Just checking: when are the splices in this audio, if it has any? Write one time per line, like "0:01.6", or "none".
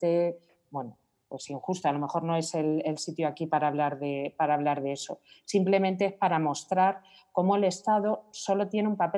none